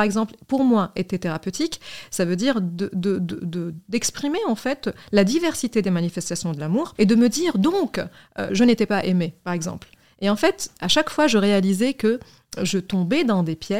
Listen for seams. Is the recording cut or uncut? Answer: cut